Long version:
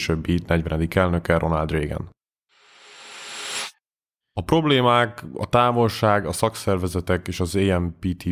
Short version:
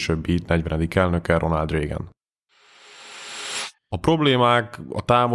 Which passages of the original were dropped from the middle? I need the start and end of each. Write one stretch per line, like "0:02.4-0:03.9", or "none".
0:03.8-0:04.2